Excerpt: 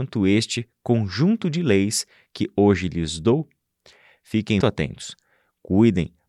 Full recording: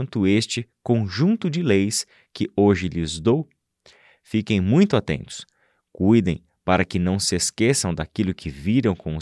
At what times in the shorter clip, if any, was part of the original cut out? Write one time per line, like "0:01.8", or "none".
0:04.6